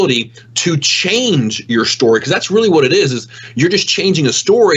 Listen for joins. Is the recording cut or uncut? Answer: uncut